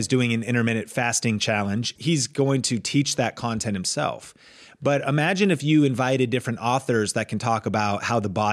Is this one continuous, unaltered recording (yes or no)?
no